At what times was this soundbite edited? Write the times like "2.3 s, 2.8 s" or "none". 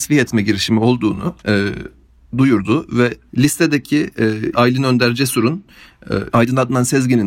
1.4 s, 4.5 s, 6.3 s